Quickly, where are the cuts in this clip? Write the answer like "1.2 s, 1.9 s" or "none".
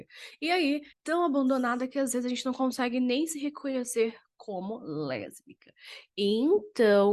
0.9 s